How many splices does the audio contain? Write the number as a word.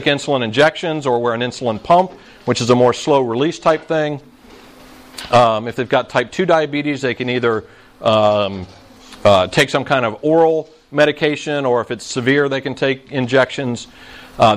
zero